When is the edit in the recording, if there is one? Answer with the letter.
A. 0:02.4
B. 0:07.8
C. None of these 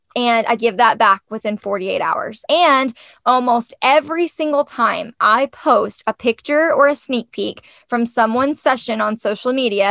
A